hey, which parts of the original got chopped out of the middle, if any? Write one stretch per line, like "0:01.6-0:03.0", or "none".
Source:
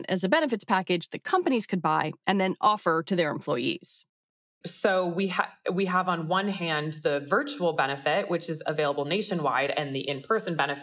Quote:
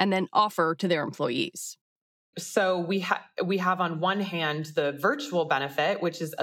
none